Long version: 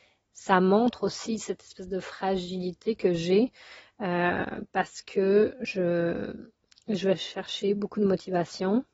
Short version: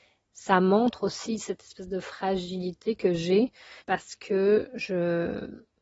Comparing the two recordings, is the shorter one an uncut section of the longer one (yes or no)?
no